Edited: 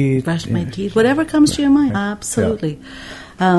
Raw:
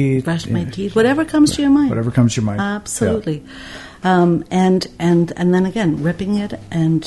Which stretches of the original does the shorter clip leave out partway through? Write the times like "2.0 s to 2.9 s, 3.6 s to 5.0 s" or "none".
1.9 s to 2.5 s

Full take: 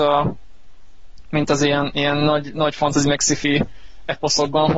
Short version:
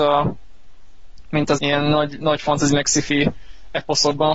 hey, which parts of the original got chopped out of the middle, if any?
1.6 s to 1.9 s

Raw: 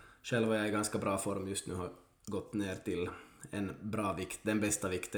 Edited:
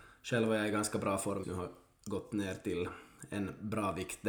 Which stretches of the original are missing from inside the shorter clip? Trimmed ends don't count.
1.4 s to 1.6 s

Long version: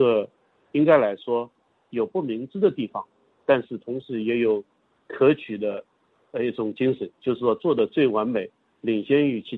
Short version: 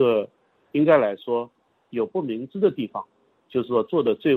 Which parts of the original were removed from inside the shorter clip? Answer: 3.4 s to 7.1 s

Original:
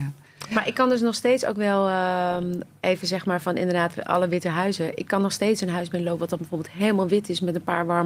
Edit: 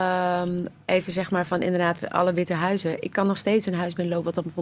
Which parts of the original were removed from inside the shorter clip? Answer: none

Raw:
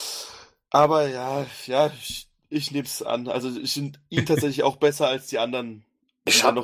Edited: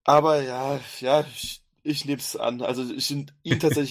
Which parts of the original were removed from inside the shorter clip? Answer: none

